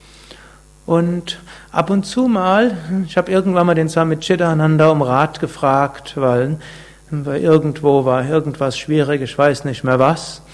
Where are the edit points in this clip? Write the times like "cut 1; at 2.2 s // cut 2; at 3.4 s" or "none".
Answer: none